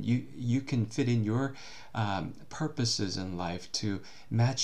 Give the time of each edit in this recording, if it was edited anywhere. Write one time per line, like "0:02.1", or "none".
none